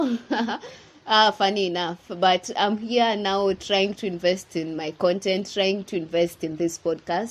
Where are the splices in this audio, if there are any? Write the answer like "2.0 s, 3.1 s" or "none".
none